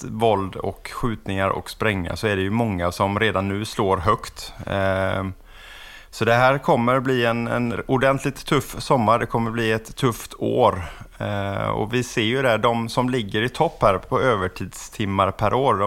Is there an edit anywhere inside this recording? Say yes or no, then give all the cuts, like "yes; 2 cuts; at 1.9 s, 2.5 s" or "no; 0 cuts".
no; 0 cuts